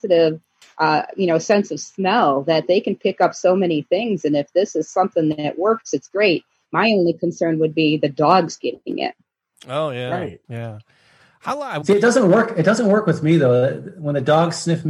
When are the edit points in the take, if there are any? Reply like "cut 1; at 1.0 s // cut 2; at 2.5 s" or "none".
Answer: cut 1; at 10.4 s